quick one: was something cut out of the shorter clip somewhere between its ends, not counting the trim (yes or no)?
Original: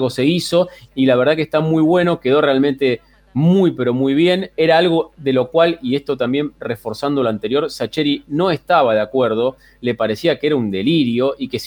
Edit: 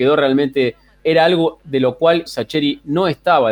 yes